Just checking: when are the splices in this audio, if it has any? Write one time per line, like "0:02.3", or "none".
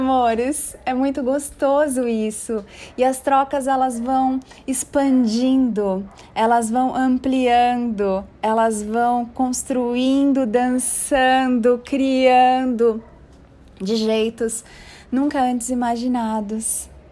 0:01.2

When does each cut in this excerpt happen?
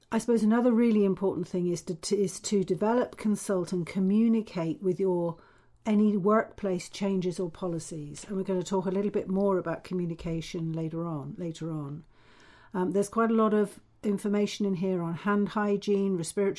none

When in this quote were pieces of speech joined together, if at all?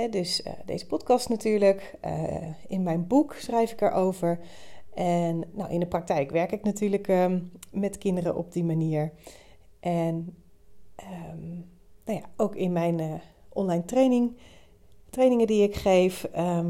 0:05.5

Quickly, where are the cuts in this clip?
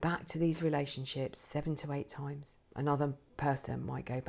0:02.6

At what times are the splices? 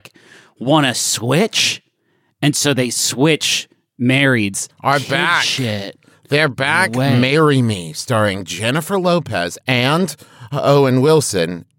0:04.7
0:09.6

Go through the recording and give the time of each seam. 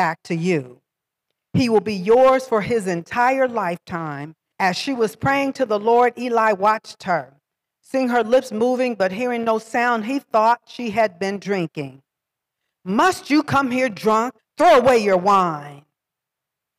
0:04.5
0:14.4

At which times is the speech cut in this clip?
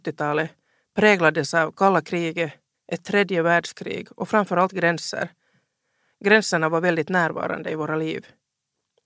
0:02.7

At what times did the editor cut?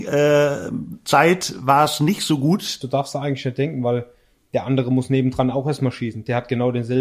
0:02.8

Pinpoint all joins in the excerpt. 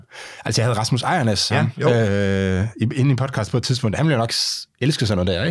0:01.5

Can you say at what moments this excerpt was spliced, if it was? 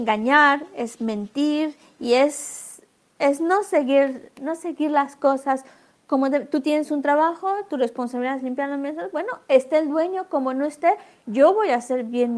none

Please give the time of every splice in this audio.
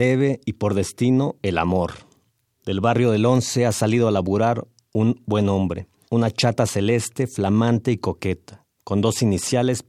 0:06.1

